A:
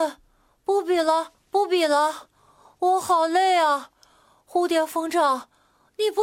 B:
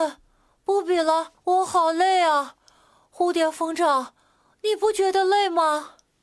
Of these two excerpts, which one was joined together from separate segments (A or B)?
B